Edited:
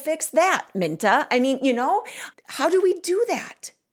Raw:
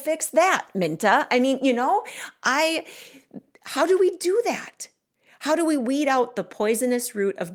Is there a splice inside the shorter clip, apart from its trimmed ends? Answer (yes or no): yes